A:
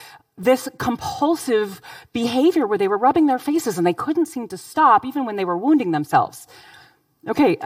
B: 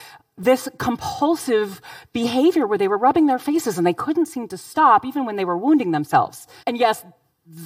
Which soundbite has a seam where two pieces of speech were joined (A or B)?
B